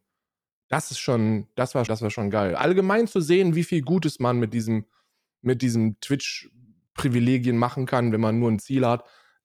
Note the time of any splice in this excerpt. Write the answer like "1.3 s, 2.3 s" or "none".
1.9 s